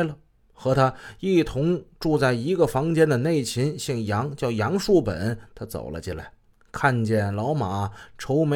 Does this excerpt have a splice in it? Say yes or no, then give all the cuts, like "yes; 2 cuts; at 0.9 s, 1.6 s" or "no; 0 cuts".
no; 0 cuts